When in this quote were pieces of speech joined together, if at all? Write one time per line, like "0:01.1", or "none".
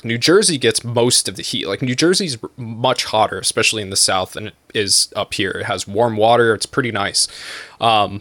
none